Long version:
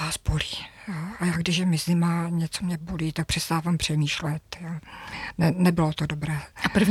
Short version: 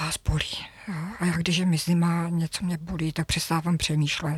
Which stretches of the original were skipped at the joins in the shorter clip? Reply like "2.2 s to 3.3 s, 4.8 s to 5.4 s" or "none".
none